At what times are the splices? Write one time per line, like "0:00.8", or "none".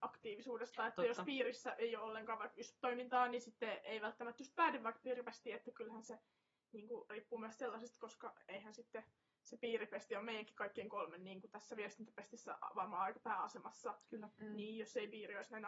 none